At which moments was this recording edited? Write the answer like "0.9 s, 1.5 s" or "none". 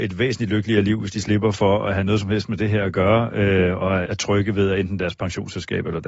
4.1 s